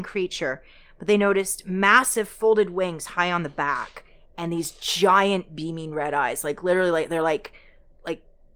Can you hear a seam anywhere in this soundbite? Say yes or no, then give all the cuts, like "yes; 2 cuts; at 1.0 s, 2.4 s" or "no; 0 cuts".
no; 0 cuts